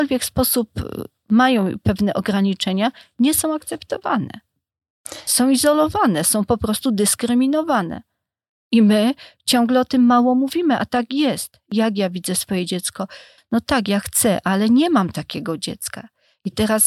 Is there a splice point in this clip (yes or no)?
yes